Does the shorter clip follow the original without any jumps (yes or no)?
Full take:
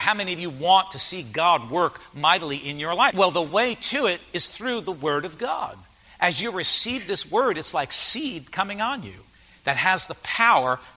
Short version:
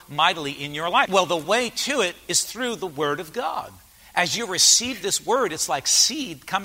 yes